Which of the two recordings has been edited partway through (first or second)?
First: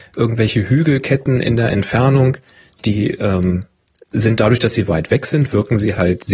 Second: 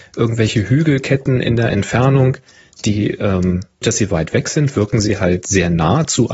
second